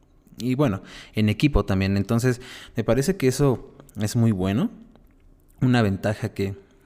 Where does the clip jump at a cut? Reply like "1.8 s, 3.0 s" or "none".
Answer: none